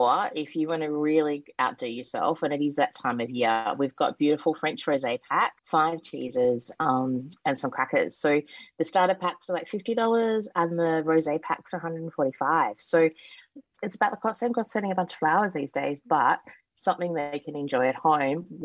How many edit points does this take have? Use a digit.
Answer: 1